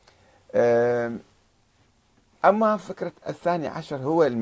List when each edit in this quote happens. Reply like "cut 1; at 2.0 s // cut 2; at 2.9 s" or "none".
none